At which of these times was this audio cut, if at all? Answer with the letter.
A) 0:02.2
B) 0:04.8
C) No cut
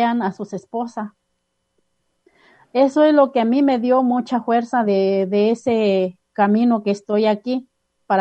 B